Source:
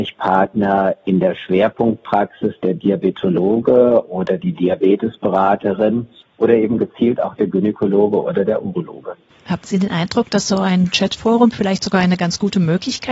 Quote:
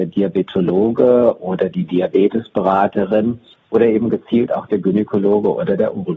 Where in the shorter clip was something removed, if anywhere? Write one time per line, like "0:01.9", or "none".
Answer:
none